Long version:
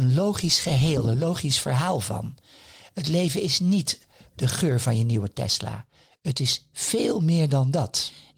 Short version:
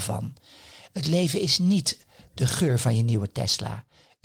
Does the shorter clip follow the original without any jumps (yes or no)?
yes